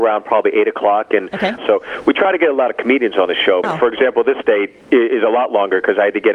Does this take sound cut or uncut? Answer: cut